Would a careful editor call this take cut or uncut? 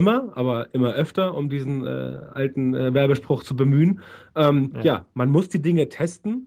uncut